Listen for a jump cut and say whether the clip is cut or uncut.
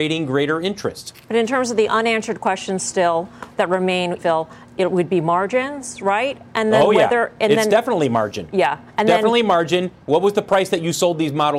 cut